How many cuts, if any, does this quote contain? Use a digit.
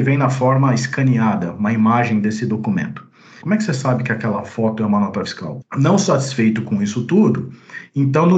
2